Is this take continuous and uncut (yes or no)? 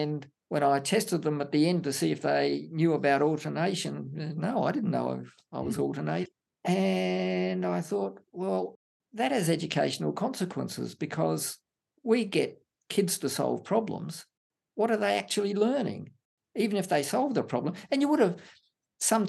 yes